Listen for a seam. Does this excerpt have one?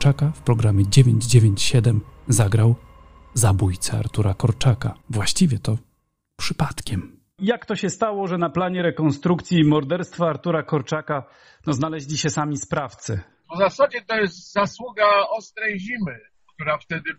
yes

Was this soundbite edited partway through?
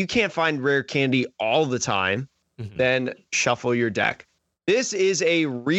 yes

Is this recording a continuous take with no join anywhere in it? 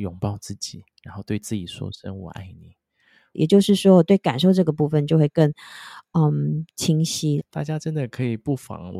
no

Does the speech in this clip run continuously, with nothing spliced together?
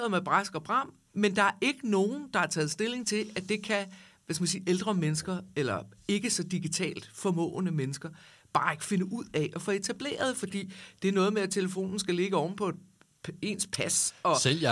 yes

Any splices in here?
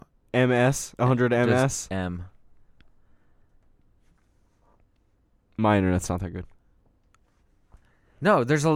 no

